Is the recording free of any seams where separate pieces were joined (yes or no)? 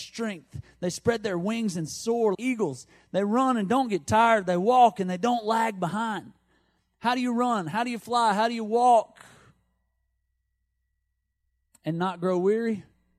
no